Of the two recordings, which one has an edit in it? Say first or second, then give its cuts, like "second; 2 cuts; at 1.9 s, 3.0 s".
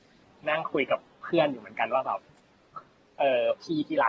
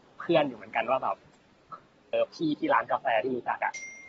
second; 1 cut; at 2.1 s